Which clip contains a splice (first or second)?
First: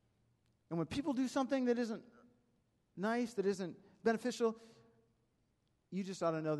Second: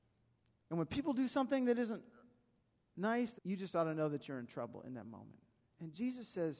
second